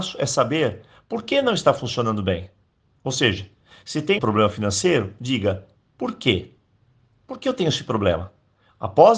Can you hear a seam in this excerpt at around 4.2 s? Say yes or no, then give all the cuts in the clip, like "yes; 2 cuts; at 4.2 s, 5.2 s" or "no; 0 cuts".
yes; 1 cut; at 4.2 s